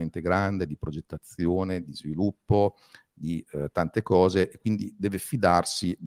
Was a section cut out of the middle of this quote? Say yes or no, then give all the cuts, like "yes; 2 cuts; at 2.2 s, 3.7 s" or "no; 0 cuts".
no; 0 cuts